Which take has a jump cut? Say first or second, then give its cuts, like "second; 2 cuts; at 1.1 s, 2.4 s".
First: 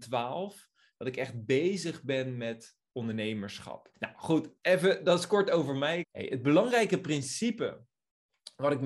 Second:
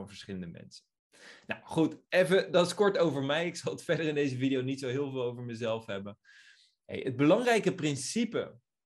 first; 2 cuts; at 3.9 s, 6.0 s